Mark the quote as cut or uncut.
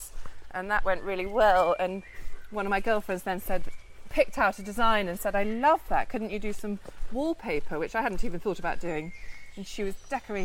uncut